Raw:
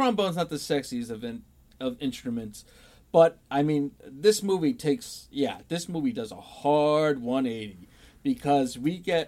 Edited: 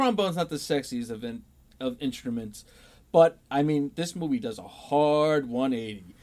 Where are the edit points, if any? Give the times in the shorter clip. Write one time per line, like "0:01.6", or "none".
0:03.9